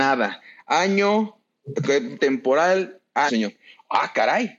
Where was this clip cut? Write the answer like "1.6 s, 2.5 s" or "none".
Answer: 2.2 s, 3.3 s